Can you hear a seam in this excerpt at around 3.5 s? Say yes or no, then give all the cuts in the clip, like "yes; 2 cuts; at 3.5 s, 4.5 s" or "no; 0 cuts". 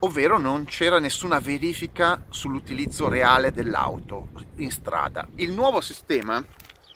no; 1 cut; at 5.3 s